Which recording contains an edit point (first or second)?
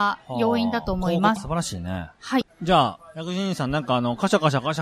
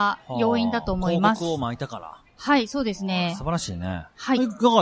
first